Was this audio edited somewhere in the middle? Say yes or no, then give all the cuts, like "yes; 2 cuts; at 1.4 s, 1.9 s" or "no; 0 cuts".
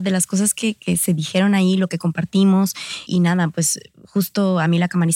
yes; 1 cut; at 3.1 s